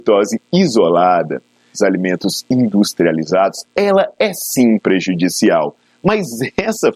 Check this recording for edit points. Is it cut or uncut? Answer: cut